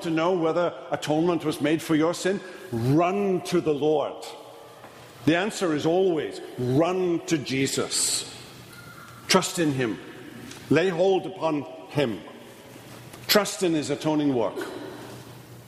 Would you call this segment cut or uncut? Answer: uncut